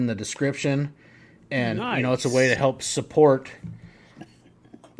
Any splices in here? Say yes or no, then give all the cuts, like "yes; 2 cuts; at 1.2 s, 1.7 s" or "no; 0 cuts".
no; 0 cuts